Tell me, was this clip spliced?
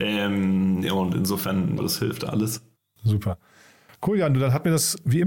yes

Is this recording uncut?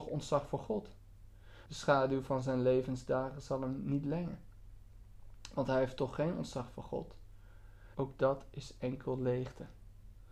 no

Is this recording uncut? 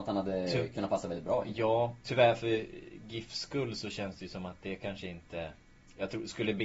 no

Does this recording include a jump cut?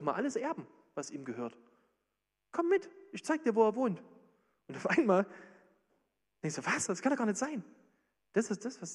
no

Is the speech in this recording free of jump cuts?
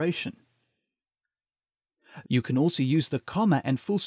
no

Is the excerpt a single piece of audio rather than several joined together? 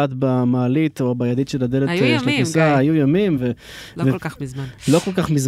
yes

